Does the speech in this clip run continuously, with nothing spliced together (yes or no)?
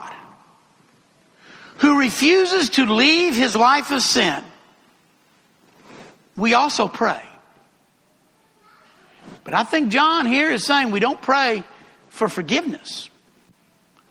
yes